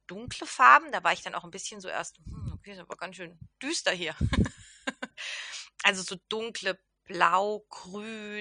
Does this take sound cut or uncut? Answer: uncut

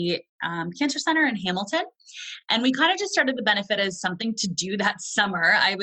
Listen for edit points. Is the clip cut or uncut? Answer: uncut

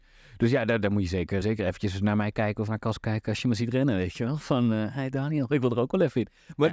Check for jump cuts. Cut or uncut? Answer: cut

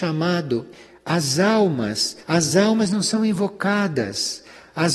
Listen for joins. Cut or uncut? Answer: cut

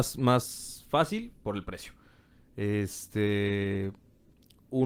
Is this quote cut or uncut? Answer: uncut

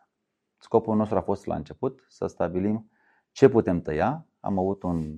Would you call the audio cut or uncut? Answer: uncut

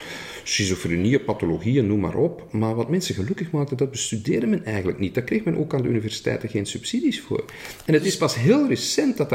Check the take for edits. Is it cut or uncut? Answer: uncut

